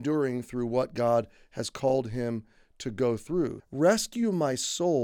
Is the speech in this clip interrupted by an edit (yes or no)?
yes